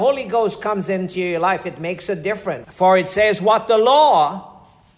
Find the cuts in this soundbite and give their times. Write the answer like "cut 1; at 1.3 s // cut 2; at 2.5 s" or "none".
cut 1; at 2.6 s